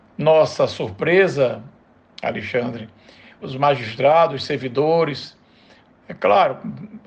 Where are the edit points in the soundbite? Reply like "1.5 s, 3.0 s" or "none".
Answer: 3.4 s, 6.0 s